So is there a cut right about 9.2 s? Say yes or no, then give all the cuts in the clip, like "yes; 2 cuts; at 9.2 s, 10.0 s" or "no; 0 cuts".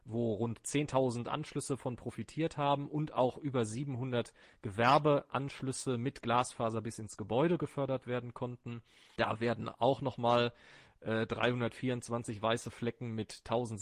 yes; 1 cut; at 9.2 s